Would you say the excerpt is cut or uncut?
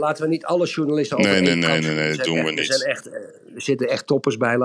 uncut